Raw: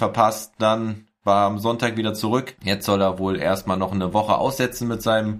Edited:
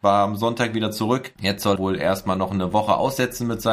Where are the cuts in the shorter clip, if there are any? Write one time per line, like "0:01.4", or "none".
0:01.8

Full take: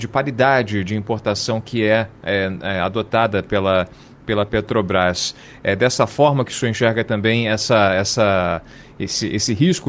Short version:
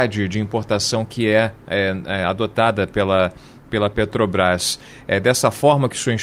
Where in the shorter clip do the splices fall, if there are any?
none

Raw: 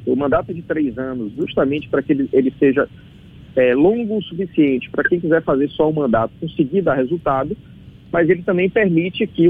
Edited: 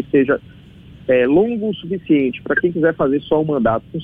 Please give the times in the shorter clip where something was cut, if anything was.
none

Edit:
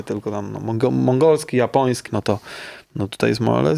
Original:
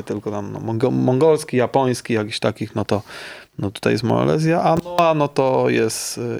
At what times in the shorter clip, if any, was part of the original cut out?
0:02.1

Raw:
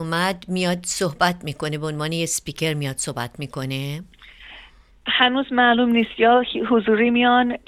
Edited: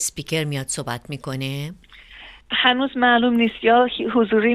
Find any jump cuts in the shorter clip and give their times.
0:02.4

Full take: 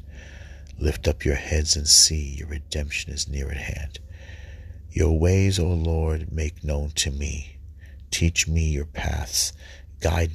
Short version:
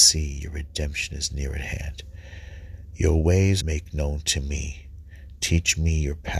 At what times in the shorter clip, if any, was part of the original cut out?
0:03.6

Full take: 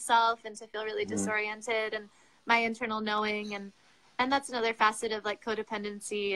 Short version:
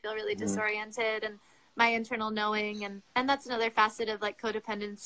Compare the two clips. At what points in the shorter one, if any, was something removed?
0:03.1

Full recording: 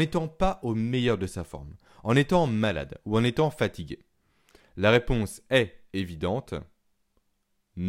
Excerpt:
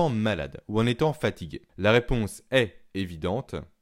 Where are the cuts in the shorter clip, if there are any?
0:01.7

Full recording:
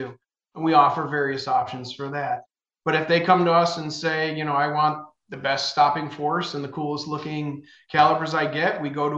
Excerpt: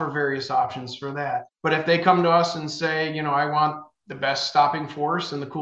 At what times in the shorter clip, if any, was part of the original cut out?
0:01.5

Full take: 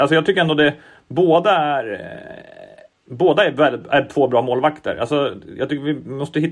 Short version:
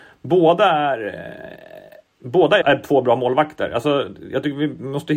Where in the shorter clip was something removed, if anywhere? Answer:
0:02.6

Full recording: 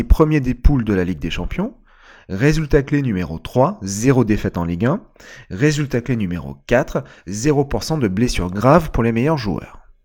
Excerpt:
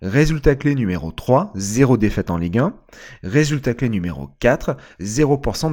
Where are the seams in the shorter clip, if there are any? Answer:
none

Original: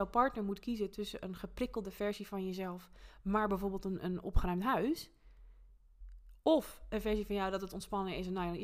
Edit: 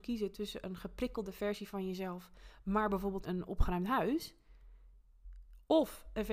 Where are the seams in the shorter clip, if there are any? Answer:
0:03.2

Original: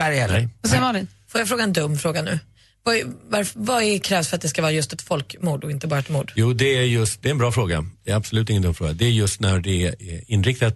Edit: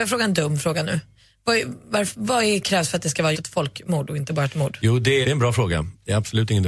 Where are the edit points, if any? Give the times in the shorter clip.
0:03.3
0:05.2

